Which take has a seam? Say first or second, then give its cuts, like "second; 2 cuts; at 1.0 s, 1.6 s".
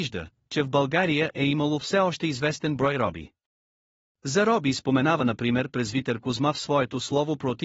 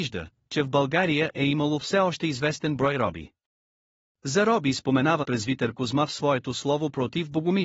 second; 1 cut; at 5.2 s